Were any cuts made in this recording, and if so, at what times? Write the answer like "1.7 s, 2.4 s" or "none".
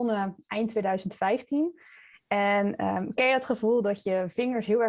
none